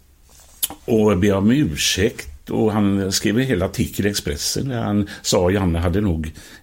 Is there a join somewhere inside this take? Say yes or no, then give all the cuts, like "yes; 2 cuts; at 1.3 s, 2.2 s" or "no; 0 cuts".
no; 0 cuts